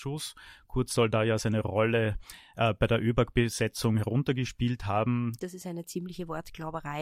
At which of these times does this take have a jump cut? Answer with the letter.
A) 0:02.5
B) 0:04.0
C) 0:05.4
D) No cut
C